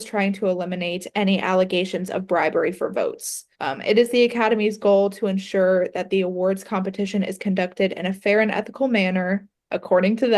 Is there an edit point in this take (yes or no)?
yes